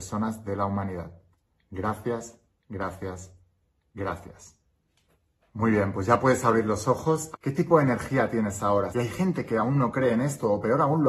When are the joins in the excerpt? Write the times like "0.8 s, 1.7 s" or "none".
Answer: 7.3 s, 8.9 s